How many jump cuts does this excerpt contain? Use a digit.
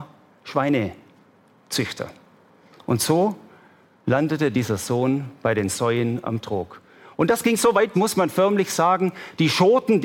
1